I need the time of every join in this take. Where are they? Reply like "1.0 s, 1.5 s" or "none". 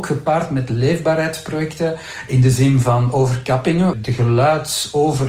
3.9 s